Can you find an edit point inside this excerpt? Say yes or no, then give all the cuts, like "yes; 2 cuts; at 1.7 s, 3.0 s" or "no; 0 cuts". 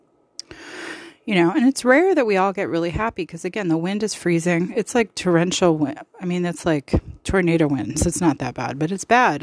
no; 0 cuts